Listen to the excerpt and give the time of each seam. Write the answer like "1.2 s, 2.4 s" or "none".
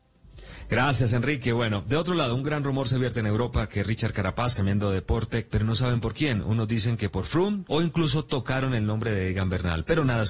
5.5 s, 7.7 s